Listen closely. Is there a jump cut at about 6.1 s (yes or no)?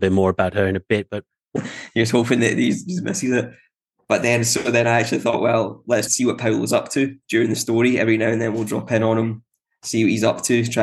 yes